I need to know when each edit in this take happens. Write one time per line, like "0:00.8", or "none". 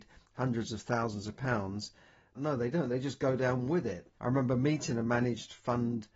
0:02.3
0:04.2